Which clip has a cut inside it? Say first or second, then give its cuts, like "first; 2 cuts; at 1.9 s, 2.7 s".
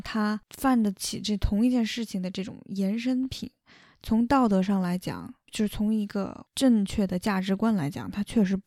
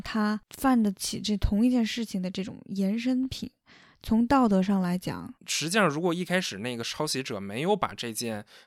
second; 1 cut; at 5.4 s